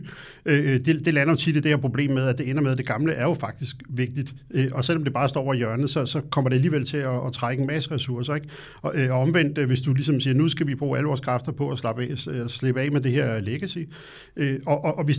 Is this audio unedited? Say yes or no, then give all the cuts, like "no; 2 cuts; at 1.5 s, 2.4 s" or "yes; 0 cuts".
yes; 0 cuts